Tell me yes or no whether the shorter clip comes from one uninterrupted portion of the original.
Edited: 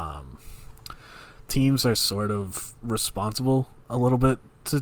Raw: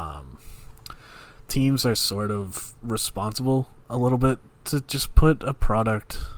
yes